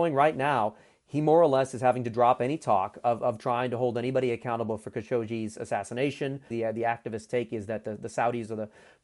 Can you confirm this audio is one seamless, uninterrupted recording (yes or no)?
no